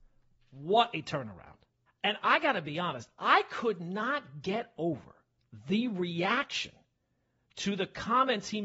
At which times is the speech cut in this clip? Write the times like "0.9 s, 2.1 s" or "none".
1.9 s